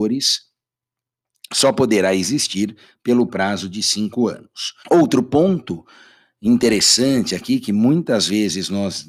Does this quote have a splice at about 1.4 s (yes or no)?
no